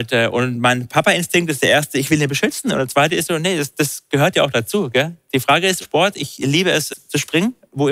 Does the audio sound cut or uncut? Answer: cut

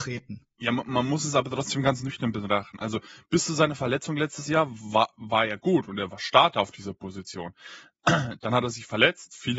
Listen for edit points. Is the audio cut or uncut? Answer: uncut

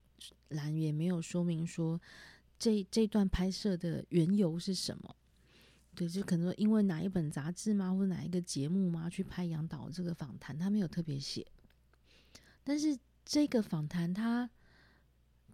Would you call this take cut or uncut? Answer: uncut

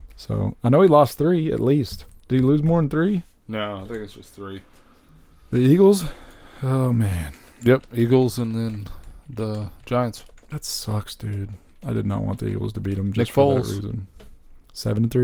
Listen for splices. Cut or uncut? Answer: uncut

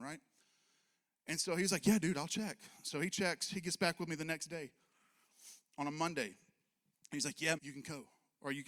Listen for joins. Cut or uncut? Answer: cut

